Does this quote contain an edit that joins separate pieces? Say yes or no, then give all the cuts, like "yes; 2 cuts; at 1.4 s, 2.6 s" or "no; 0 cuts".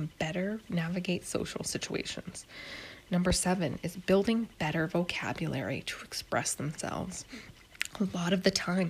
no; 0 cuts